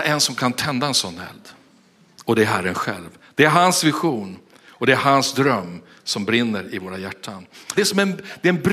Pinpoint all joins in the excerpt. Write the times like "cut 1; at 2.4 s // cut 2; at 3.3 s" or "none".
cut 1; at 7.8 s